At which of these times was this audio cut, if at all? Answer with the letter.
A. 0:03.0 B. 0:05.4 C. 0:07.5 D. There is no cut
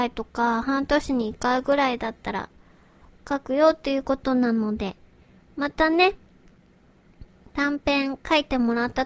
D